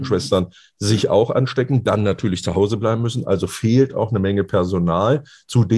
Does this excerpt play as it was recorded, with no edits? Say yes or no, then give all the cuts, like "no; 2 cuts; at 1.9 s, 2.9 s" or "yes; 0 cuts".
yes; 0 cuts